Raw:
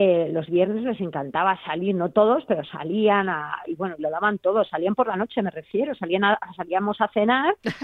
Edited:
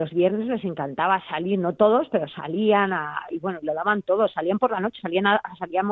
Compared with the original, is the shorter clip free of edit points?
no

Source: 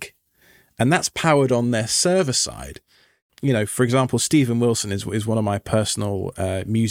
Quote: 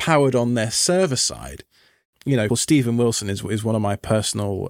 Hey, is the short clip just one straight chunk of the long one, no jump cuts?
no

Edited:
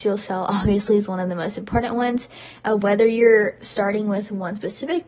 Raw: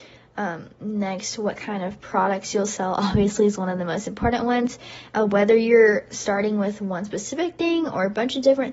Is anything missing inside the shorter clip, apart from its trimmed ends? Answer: no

